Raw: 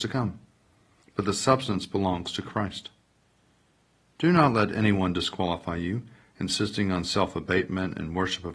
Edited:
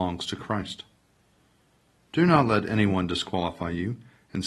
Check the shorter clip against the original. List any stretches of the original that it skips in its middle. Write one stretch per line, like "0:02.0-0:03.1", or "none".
none